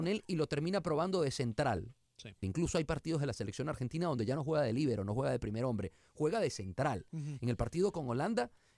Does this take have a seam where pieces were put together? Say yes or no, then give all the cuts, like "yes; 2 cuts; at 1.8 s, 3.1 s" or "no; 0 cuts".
yes; 1 cut; at 2.4 s